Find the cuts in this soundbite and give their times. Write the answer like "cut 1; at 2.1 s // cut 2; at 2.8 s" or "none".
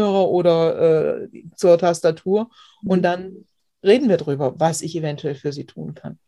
none